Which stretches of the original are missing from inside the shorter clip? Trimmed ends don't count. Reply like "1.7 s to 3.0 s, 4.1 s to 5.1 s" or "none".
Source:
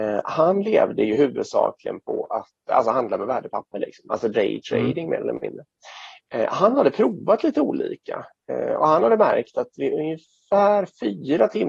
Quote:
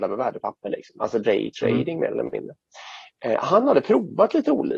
none